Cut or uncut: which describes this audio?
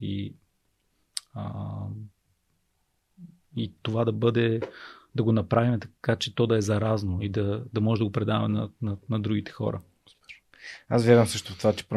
uncut